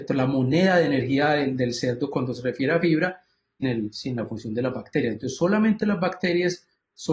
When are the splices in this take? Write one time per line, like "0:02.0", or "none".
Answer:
0:03.6